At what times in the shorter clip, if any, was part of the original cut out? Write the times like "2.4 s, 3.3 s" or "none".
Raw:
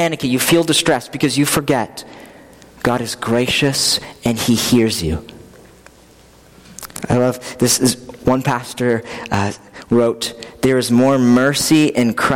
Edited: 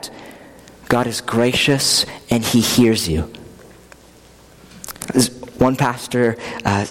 5.1 s